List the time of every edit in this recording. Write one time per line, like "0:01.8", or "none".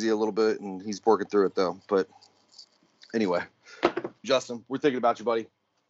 0:04.2